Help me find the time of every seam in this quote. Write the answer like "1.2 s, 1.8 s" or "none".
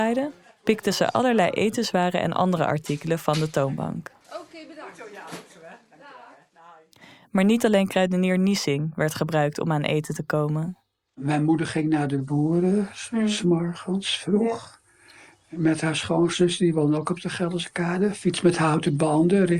none